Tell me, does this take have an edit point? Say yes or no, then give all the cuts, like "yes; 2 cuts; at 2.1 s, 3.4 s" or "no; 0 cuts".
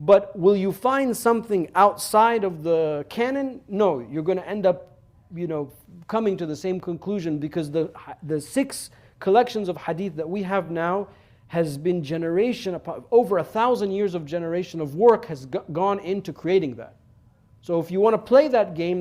no; 0 cuts